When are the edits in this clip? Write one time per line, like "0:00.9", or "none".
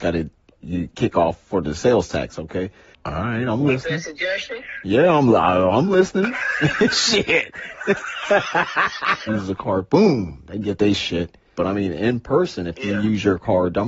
0:02.9
0:09.3
0:11.5